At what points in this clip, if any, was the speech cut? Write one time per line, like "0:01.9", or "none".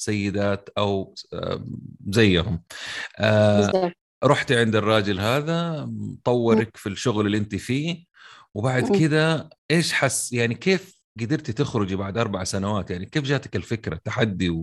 0:09.6

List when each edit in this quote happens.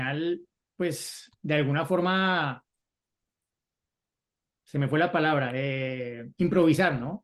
0:01.4
0:04.6

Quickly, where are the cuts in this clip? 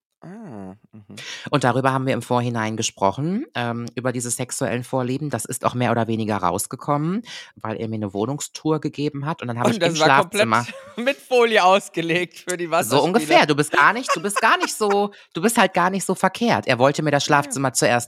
0:07.5

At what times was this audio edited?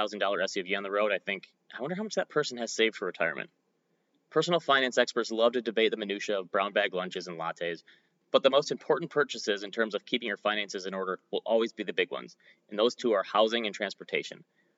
0:01.6

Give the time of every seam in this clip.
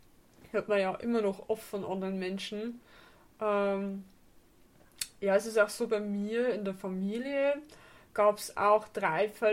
none

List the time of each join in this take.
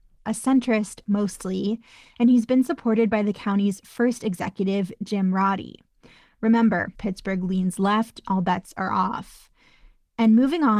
0:06.9
0:08.2

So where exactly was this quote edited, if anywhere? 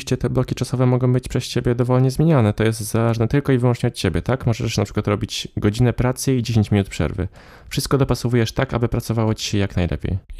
none

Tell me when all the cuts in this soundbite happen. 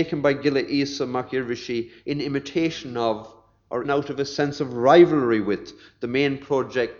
0:03.8

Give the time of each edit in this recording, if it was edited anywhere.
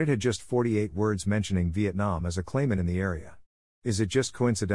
none

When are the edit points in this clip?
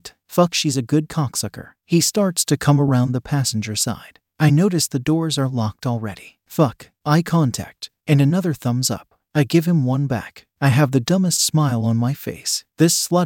0:06.4

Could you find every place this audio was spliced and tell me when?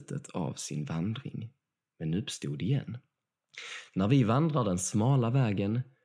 none

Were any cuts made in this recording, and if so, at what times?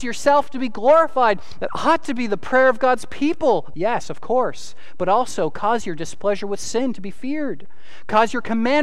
0:01.6
0:03.7

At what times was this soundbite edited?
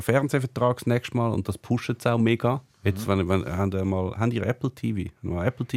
none

